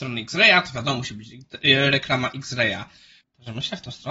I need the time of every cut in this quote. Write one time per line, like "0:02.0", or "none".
0:03.2